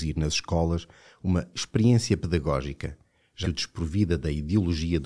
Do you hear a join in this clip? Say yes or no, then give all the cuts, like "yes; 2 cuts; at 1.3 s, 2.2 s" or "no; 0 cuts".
yes; 1 cut; at 3.4 s